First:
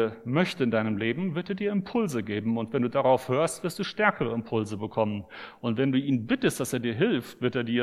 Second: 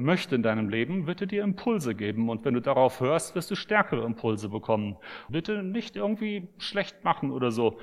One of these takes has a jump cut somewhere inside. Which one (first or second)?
second